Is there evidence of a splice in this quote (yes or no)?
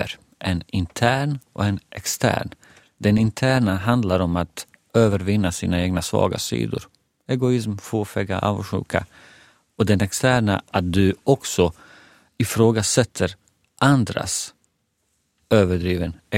no